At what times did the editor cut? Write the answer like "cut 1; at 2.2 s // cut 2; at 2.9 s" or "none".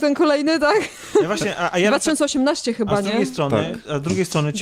none